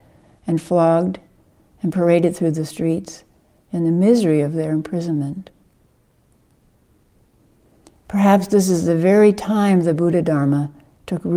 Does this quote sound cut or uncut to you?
uncut